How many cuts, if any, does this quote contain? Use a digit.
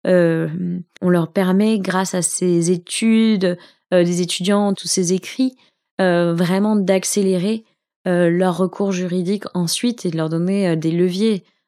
2